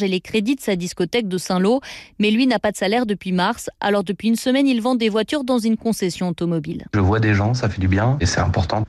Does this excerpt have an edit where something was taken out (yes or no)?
no